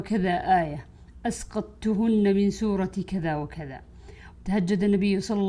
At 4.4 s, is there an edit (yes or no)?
yes